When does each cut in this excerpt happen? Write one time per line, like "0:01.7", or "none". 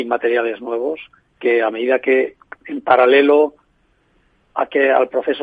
0:02.6

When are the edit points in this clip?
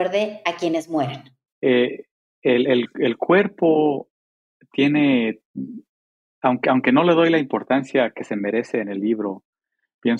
0:01.5

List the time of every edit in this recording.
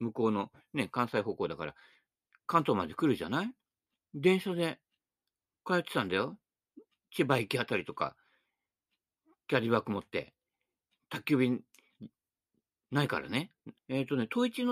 0:13.8

